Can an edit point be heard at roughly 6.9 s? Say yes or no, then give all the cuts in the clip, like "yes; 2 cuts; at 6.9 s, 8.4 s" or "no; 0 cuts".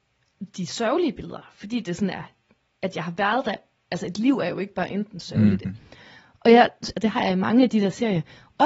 yes; 2 cuts; at 5.7 s, 6.9 s